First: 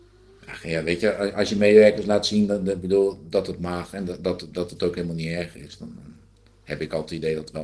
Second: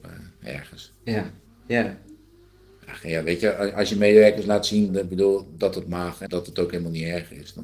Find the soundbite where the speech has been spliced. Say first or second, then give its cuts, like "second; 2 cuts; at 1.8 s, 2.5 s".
second; 3 cuts; at 1.5 s, 4.9 s, 6.3 s